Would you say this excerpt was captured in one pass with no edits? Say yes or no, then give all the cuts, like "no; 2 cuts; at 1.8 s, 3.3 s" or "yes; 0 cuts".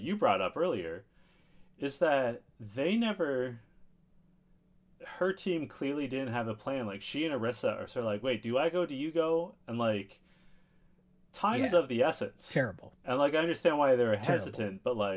yes; 0 cuts